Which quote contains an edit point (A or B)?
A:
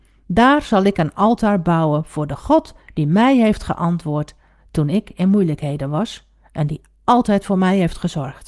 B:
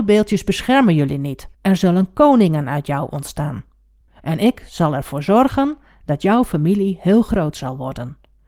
B